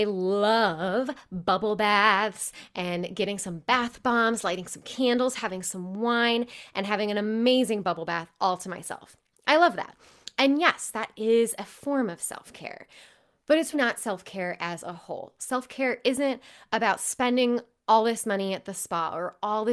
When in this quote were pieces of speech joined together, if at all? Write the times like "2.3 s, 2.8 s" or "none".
13.7 s